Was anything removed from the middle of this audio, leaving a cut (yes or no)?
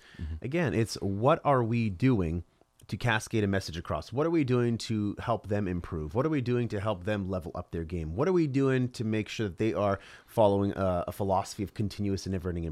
no